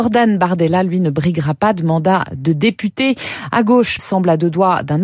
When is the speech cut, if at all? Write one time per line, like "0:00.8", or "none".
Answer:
0:04.0